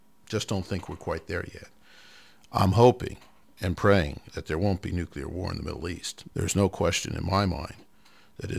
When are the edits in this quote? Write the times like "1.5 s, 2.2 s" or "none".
6.3 s